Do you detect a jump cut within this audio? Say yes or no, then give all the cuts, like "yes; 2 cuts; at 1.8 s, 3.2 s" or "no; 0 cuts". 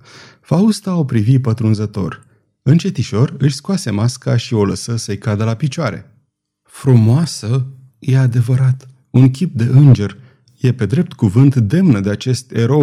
yes; 1 cut; at 7.9 s